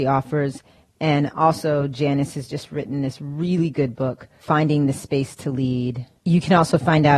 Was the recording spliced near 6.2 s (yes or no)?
no